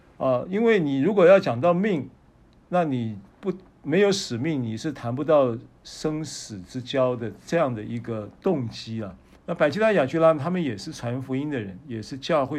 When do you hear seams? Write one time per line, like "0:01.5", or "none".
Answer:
0:09.3